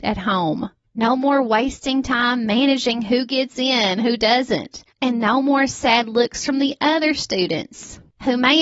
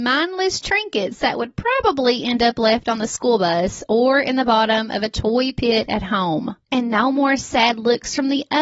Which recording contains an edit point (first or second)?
second